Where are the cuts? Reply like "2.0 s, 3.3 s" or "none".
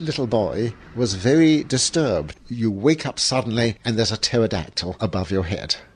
2.3 s